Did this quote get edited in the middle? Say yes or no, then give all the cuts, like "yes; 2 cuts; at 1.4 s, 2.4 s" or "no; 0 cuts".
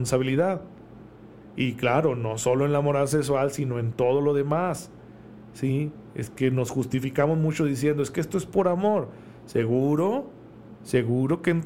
no; 0 cuts